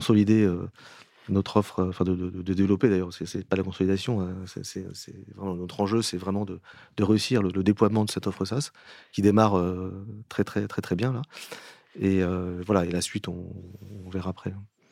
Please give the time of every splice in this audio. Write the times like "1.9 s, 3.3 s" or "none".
none